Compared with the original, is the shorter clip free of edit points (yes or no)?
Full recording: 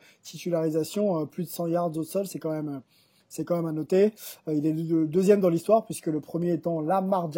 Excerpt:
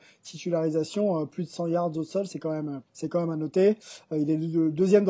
no